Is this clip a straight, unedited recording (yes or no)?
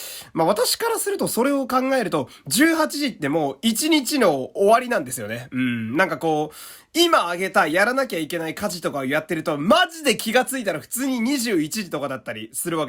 yes